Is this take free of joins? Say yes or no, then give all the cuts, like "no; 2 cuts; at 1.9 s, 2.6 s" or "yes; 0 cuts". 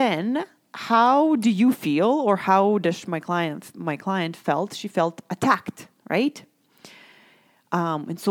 yes; 0 cuts